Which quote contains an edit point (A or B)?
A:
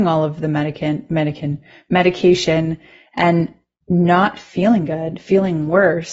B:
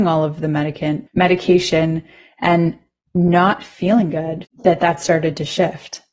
B